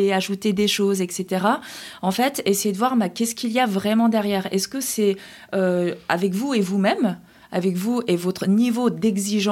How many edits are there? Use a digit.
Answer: 0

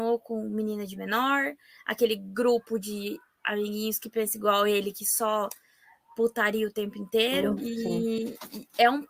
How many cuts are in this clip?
1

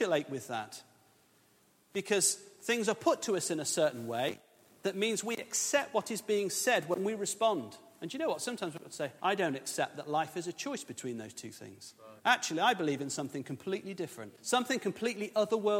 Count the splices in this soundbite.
3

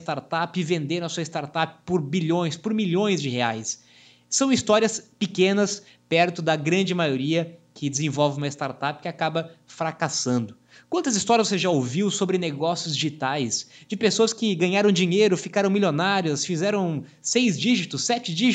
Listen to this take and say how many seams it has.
0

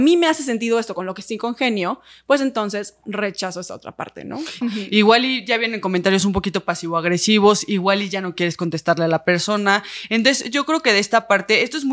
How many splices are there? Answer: 1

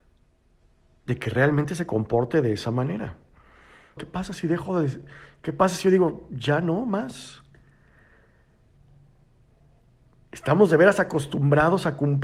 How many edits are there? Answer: 1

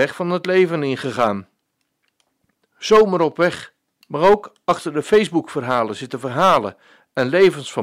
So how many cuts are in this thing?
1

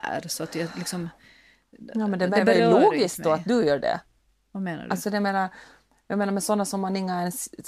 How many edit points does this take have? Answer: 0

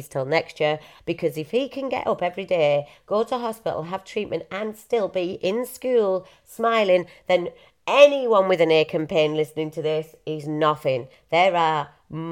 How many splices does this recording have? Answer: 1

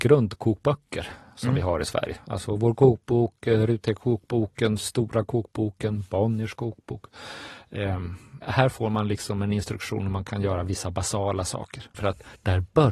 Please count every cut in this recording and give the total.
2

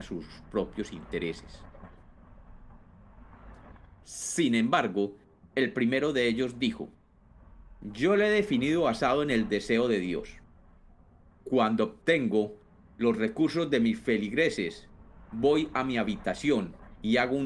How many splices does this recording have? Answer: 1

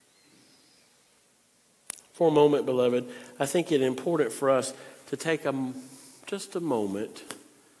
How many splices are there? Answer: 0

